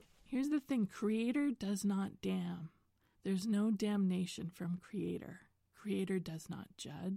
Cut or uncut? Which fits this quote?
uncut